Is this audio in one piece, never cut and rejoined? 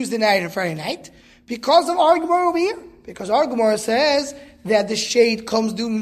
yes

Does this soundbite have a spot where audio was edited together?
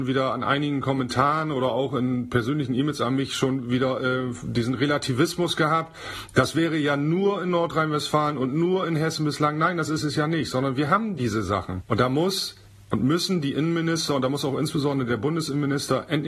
no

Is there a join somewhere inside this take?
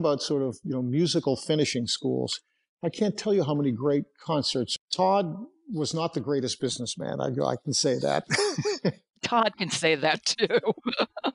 no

